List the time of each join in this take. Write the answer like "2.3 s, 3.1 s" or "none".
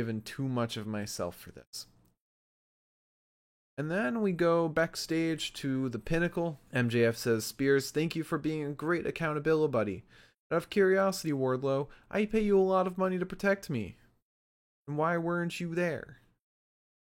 6.7 s